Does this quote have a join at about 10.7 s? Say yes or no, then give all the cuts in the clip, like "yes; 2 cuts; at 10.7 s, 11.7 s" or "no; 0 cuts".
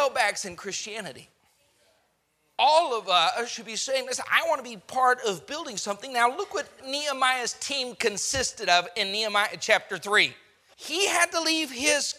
yes; 1 cut; at 10.7 s